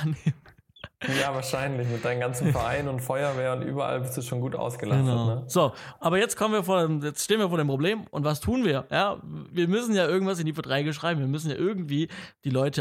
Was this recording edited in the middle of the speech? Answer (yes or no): no